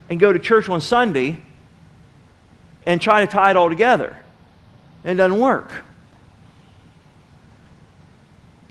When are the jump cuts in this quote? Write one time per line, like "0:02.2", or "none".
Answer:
none